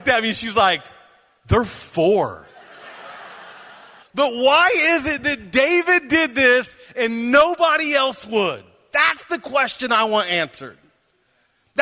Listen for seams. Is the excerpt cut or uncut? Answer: cut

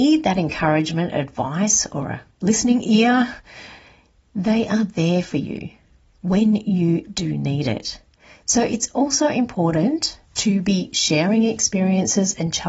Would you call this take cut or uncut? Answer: uncut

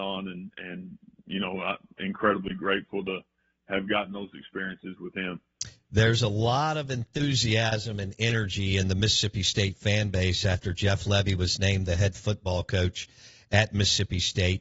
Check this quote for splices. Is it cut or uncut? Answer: uncut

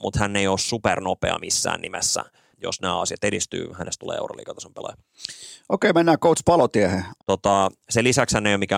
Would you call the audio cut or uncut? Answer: cut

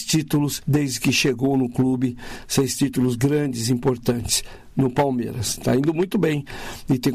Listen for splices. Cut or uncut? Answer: uncut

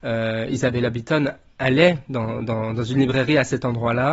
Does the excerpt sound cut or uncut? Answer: uncut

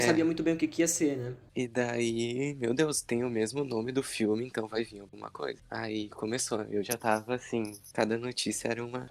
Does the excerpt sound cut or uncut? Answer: cut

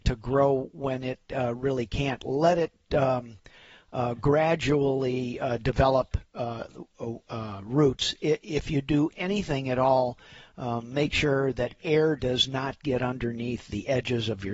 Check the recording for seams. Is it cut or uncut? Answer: uncut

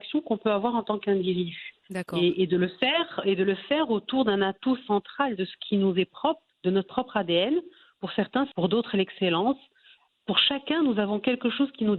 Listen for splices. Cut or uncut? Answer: cut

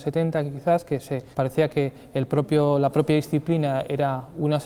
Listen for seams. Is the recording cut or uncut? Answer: cut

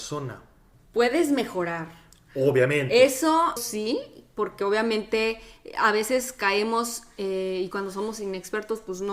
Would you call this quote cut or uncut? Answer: cut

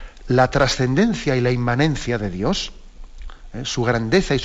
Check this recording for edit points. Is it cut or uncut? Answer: uncut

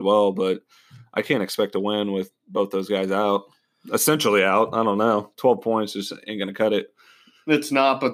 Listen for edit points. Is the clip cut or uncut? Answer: uncut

